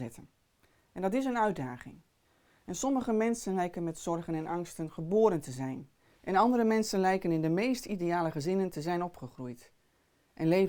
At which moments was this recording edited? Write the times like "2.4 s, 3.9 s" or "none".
none